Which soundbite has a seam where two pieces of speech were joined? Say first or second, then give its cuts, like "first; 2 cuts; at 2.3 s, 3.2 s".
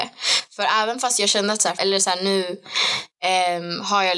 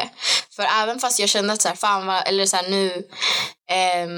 first; 1 cut; at 1.8 s